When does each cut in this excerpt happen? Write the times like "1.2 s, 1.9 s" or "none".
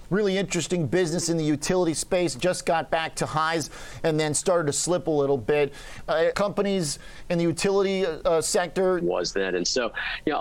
6.3 s, 9.0 s